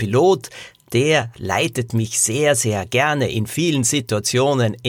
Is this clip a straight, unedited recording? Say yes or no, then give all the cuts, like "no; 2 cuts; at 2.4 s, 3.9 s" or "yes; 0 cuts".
yes; 0 cuts